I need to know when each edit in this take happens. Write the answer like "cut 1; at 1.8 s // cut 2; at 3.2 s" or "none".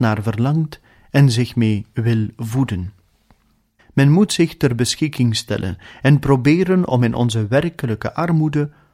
cut 1; at 3.8 s